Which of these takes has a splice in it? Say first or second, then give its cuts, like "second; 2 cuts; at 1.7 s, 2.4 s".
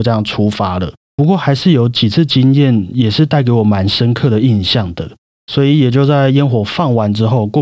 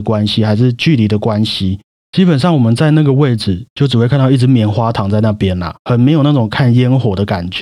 first; 2 cuts; at 1.0 s, 5.4 s